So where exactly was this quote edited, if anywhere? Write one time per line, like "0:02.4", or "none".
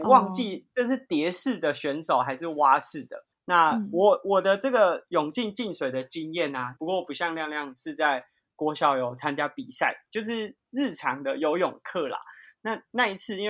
0:03.3
0:06.8